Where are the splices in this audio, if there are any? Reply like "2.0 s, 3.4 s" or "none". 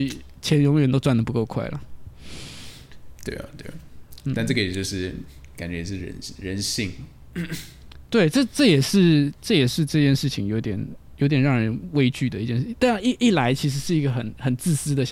none